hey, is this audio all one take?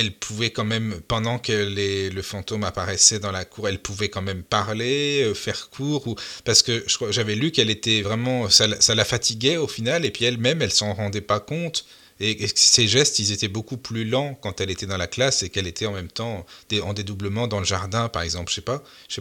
yes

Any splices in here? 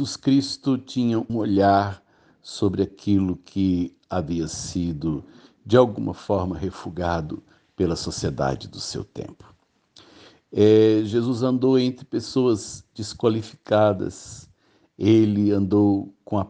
yes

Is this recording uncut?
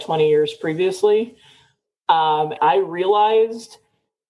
no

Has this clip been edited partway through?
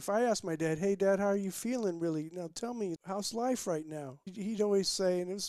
yes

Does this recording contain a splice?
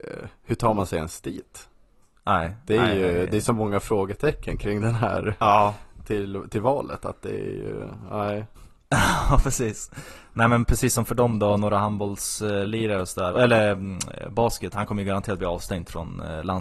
yes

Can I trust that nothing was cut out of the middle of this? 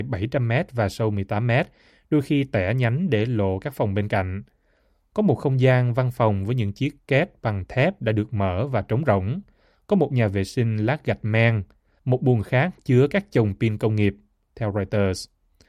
no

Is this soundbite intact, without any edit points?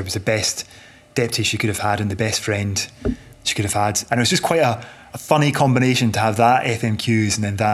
no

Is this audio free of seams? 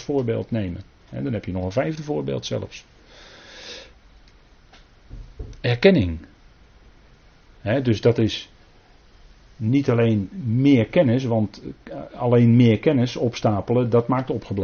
yes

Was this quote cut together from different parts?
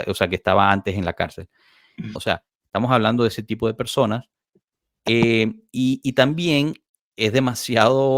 yes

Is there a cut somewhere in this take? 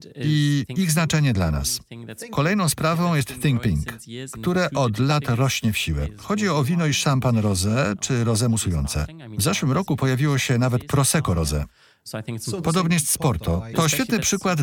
yes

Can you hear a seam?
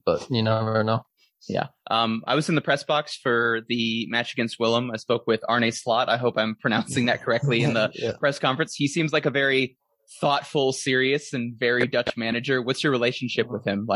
no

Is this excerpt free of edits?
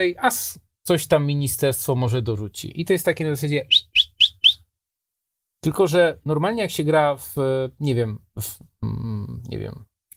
yes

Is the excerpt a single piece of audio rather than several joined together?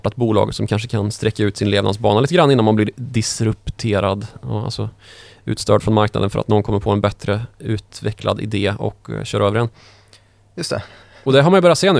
yes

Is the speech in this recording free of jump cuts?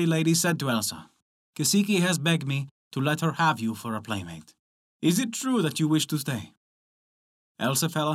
yes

